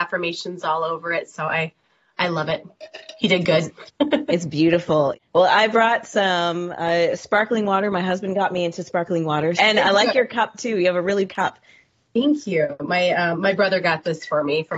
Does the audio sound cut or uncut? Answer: cut